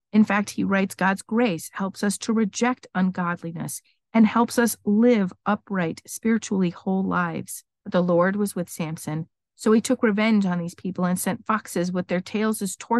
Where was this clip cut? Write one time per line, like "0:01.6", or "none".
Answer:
0:07.8
0:09.5